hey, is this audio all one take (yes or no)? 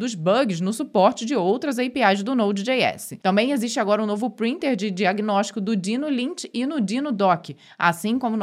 yes